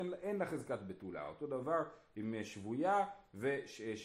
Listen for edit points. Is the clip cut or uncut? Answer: uncut